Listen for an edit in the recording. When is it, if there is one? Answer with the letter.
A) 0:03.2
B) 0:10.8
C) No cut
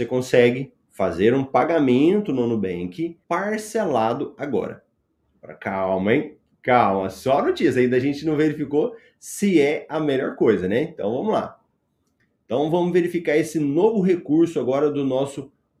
A